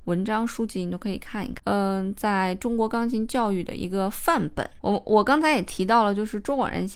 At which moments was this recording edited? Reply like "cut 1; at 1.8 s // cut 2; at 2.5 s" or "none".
cut 1; at 1.6 s